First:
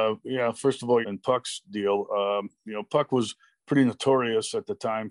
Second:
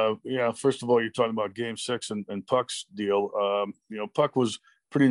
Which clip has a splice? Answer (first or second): first